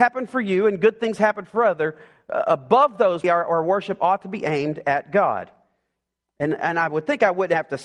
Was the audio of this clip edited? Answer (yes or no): yes